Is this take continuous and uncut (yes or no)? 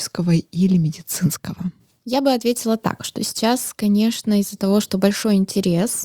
yes